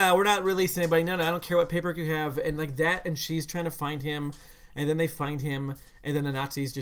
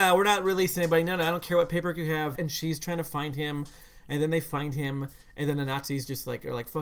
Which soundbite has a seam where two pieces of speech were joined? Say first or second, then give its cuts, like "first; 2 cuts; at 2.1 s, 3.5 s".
second; 1 cut; at 2.3 s